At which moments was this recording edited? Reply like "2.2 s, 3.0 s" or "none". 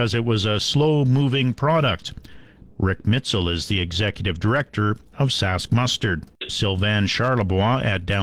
2.7 s, 6.5 s